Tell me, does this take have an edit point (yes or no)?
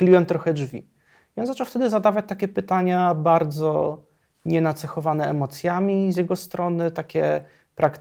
no